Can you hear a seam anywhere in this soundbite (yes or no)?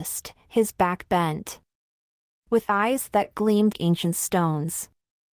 yes